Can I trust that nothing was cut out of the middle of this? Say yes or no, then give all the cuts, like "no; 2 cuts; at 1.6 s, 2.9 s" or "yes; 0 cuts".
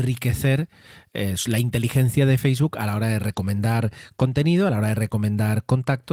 yes; 0 cuts